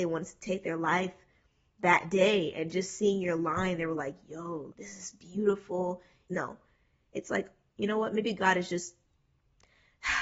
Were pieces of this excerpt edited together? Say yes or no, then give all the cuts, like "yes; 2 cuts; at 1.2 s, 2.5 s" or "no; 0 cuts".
yes; 2 cuts; at 4.7 s, 6.3 s